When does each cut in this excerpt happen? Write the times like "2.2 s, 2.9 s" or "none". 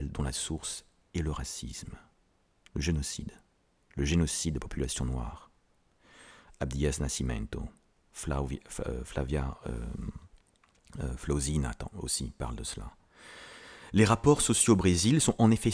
none